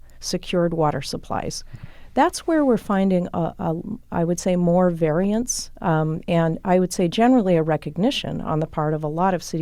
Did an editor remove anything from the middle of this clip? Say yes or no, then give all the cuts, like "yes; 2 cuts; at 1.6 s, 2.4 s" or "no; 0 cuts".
no; 0 cuts